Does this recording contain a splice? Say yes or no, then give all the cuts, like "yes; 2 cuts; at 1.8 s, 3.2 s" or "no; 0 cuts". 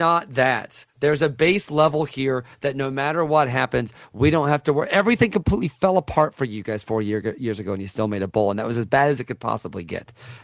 no; 0 cuts